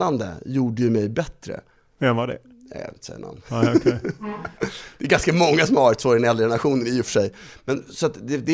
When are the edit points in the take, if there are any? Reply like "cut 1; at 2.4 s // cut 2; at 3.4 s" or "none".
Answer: none